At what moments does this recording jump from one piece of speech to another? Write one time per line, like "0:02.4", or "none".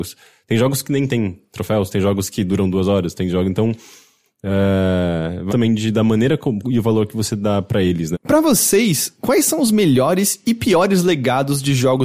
0:05.5
0:06.6
0:08.1